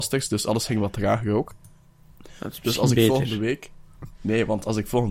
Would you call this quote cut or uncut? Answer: uncut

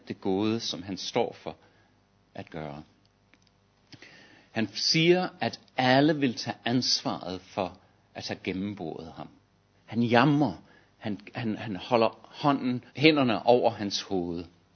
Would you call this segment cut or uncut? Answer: cut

